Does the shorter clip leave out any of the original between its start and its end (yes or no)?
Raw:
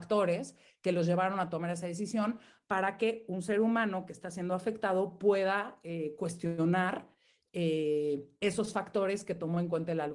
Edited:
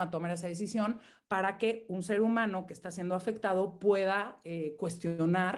no